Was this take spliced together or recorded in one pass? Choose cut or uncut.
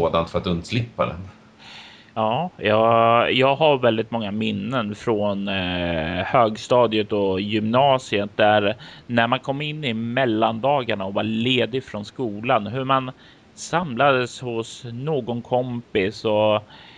uncut